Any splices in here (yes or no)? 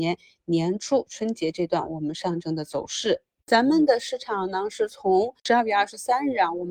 yes